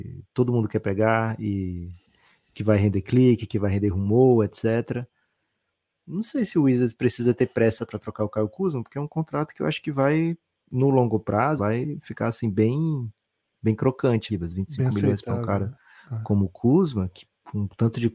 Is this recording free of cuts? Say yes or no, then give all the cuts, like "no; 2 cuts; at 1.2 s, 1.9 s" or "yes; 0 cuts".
no; 2 cuts; at 11.6 s, 14.3 s